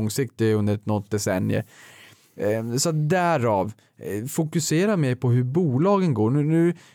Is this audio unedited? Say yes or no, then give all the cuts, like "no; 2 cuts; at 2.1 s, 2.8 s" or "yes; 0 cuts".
yes; 0 cuts